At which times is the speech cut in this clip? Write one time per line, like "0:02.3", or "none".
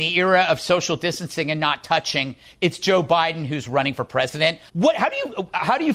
0:04.7